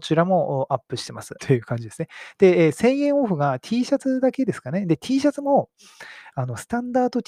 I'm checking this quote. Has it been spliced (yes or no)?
yes